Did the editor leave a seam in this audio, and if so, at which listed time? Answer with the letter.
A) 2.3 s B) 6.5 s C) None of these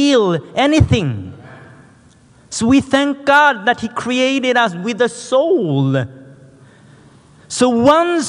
C